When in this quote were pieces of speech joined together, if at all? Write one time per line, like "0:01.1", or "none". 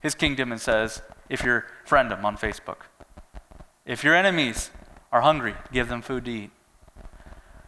0:01.8